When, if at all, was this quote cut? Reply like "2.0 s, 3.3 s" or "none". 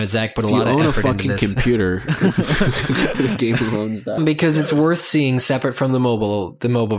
3.1 s, 4.2 s